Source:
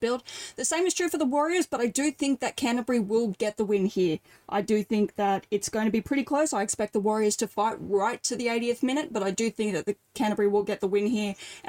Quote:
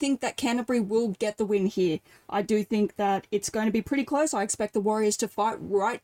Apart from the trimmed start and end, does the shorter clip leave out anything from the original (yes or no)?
no